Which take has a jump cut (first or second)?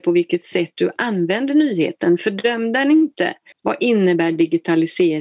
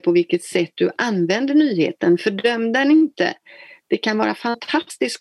first